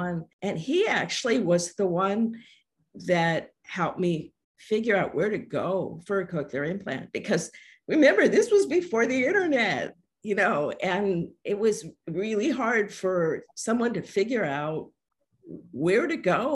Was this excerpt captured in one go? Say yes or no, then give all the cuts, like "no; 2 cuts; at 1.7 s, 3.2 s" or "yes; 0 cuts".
yes; 0 cuts